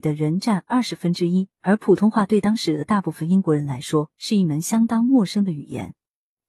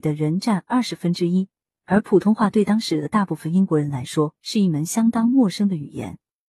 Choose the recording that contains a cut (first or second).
first